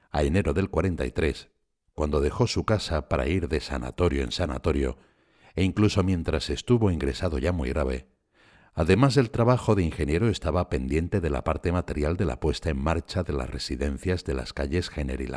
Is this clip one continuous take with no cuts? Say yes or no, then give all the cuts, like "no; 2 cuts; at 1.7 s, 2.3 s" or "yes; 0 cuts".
yes; 0 cuts